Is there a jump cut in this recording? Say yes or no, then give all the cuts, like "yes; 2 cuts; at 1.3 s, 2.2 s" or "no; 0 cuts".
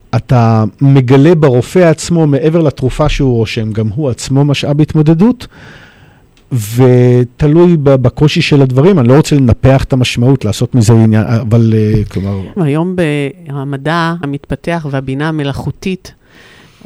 yes; 2 cuts; at 12.6 s, 14.2 s